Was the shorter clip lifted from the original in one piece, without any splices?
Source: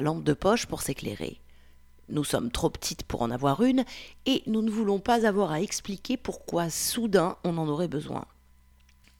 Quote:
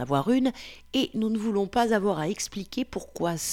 yes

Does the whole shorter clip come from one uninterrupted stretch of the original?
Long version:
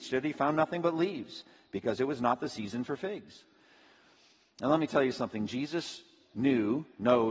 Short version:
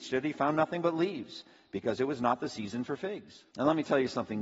no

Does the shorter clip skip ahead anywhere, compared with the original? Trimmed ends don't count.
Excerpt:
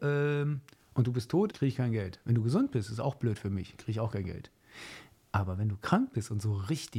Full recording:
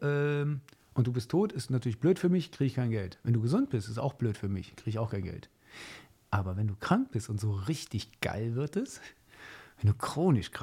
yes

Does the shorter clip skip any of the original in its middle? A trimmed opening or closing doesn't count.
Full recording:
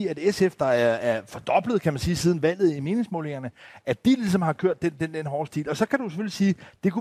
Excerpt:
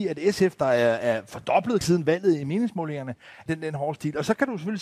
yes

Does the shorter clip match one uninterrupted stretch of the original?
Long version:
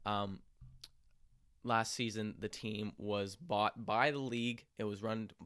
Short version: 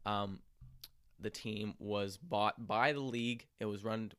no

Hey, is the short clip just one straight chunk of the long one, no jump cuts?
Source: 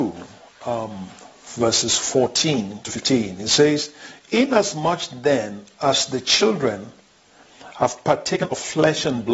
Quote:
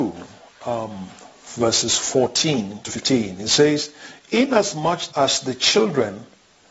no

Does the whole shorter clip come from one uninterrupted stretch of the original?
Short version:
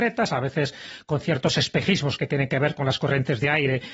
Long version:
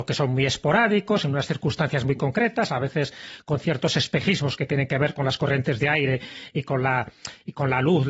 yes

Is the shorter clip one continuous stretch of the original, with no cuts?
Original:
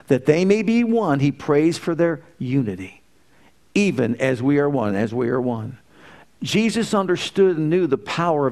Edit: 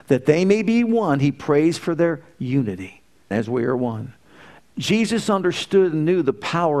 no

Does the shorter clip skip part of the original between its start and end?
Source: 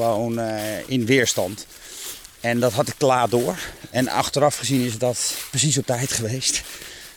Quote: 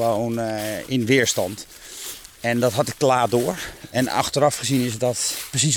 no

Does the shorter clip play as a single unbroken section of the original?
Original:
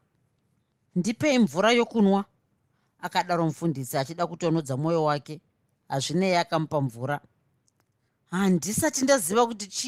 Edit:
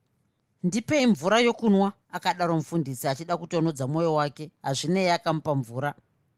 no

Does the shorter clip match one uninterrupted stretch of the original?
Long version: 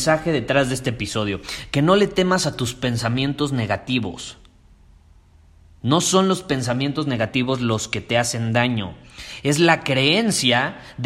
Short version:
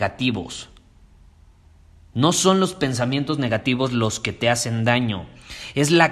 yes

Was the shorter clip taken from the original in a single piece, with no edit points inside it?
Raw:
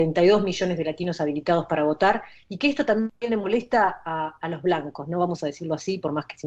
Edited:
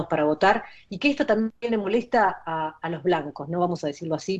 yes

